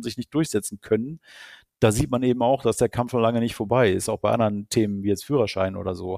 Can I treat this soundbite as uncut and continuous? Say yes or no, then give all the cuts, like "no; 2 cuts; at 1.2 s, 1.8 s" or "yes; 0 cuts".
yes; 0 cuts